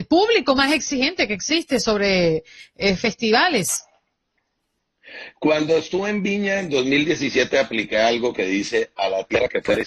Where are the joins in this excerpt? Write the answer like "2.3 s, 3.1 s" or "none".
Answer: none

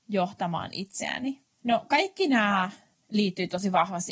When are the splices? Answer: none

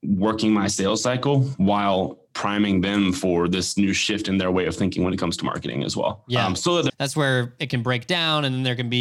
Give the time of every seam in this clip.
6.9 s

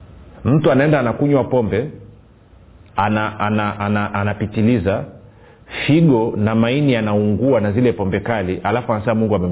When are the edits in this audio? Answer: none

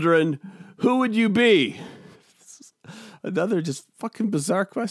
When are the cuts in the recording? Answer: none

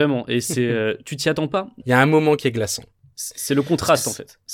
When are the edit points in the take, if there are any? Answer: 1.8 s

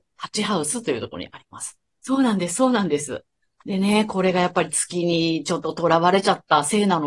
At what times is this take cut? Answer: 1.9 s

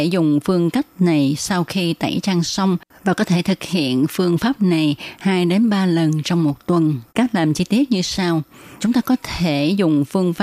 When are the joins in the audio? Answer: 7.1 s, 8.8 s

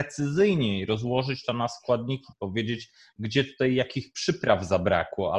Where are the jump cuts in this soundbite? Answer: none

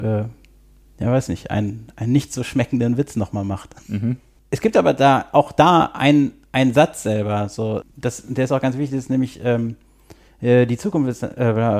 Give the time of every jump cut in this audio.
7.8 s

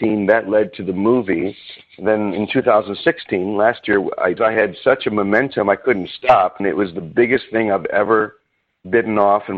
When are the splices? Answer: 4.4 s, 6.6 s

